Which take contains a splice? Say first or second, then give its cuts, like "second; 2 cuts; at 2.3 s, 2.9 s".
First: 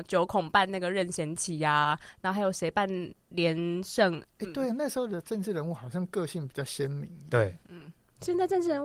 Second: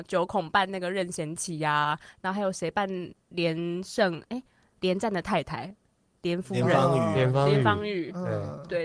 first; 1 cut; at 4.2 s